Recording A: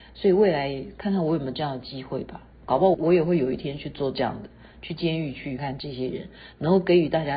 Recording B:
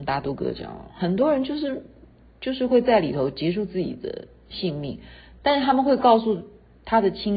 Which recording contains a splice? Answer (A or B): A